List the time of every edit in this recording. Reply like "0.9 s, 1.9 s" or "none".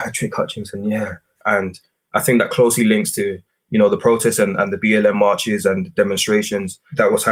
1.4 s